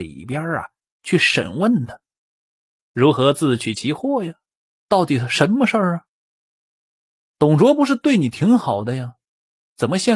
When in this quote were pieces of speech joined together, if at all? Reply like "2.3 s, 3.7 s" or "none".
2.8 s

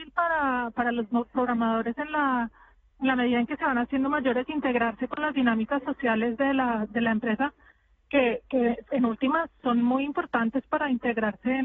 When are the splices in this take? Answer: none

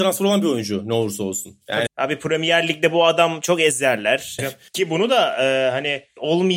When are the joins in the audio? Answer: 1.9 s, 4.4 s

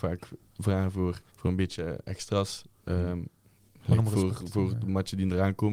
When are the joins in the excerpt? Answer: 1.3 s

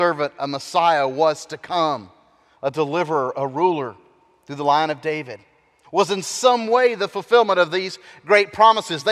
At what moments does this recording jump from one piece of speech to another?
5.8 s

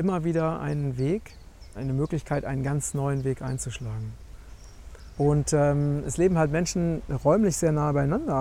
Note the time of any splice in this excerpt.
1.7 s, 5.2 s

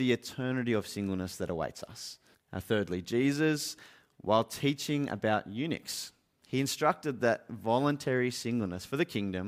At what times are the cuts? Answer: 2.3 s

